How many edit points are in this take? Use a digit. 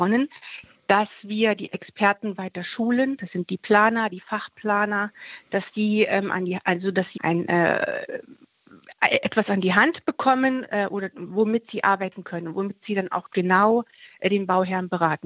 1